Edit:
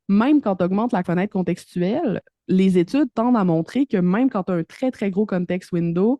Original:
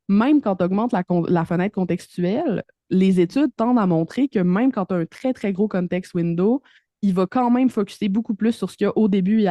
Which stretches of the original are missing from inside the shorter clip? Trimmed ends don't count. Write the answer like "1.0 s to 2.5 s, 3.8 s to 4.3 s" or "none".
1.0 s to 1.5 s